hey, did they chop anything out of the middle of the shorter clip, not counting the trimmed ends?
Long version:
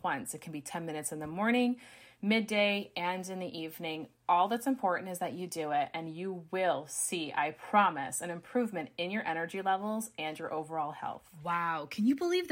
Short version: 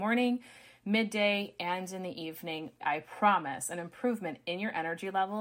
yes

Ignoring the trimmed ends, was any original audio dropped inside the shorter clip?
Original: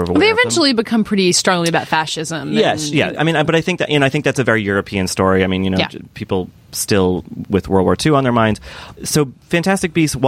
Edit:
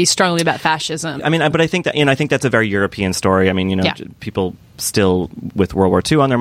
yes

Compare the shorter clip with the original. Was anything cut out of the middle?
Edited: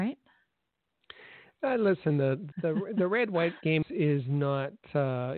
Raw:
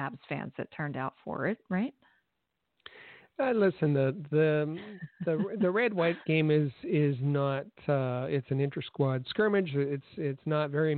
yes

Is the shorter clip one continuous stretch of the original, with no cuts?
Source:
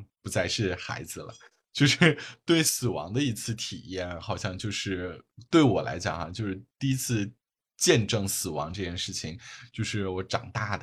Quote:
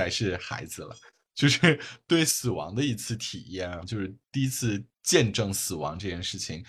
no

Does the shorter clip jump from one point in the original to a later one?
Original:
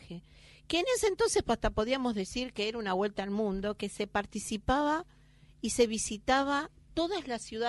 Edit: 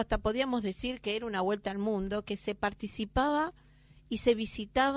no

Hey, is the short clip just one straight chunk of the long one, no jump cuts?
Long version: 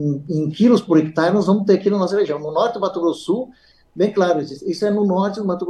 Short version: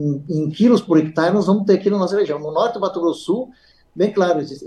yes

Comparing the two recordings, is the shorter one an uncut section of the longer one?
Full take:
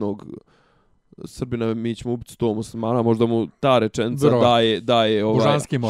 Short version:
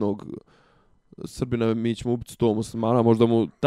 yes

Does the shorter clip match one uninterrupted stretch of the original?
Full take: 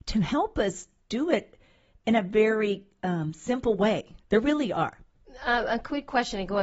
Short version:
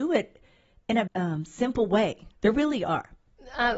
no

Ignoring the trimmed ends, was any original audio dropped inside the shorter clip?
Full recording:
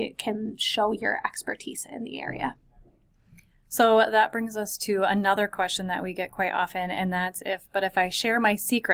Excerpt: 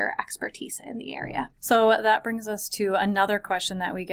yes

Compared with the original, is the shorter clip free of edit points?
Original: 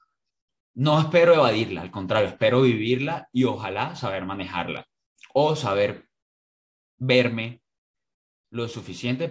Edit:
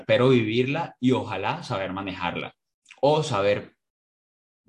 yes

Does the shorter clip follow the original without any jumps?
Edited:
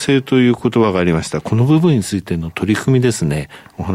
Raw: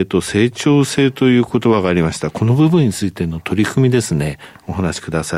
yes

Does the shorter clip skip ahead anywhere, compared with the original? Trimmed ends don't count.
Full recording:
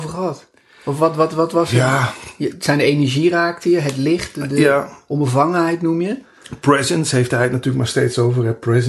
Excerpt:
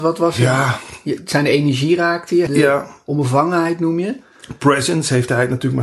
yes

